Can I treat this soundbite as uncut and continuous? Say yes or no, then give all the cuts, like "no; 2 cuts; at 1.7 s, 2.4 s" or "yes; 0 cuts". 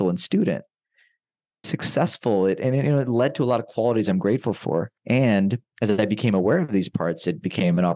no; 2 cuts; at 1.6 s, 5.0 s